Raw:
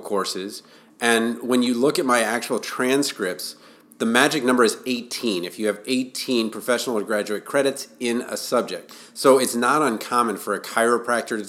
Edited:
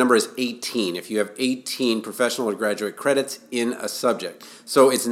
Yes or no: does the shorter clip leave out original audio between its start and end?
no